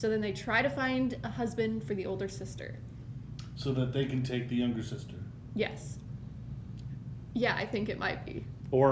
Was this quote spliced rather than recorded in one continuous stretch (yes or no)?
yes